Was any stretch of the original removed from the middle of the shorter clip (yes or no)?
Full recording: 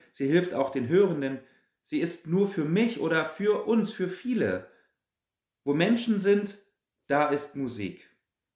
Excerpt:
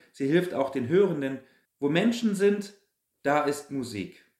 yes